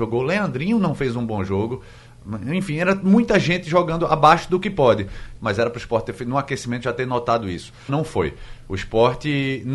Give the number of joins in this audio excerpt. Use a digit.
2